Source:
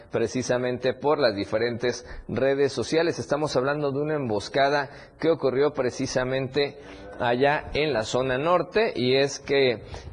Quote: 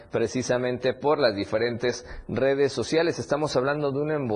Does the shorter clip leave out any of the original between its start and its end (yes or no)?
no